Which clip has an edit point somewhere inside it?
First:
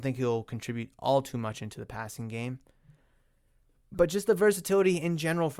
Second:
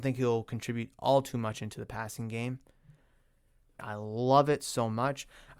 second; 1 cut; at 3.8 s

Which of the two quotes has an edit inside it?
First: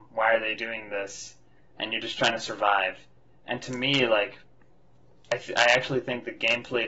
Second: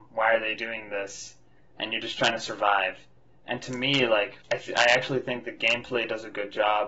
second; 1 cut; at 4.4 s

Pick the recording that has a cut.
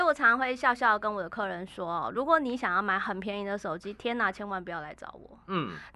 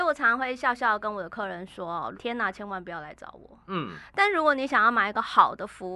second; 1 cut; at 2.1 s

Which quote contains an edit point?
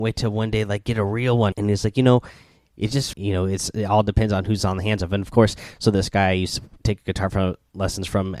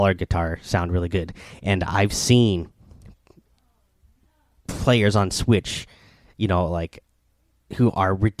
first; 2 cuts; at 1.5 s, 3.1 s

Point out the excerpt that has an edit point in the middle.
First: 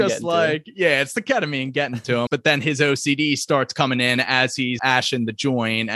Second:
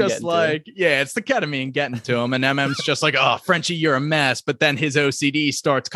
first; 2 cuts; at 2.3 s, 4.8 s

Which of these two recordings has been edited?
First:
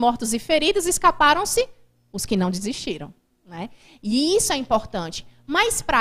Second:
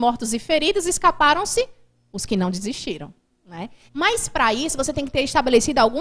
second; 1 cut; at 3.9 s

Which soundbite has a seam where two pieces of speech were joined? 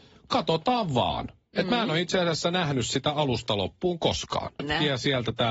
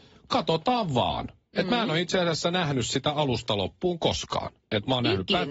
first; 1 cut; at 4.6 s

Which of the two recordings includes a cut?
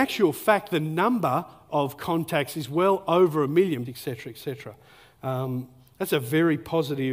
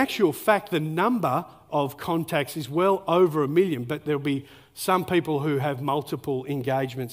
first; 1 cut; at 3.8 s

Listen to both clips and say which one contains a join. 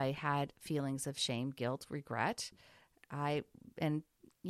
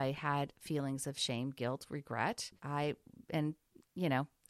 second; 1 cut; at 2.6 s

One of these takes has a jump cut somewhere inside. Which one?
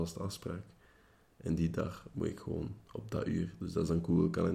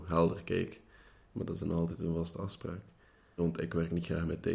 second; 2 cuts; at 1.3 s, 3.4 s

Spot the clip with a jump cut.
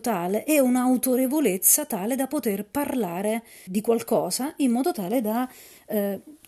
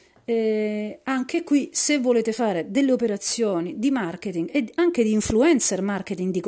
first; 1 cut; at 3.7 s

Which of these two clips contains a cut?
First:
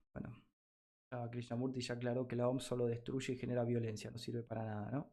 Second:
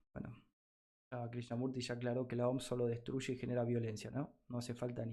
second; 1 cut; at 4.1 s

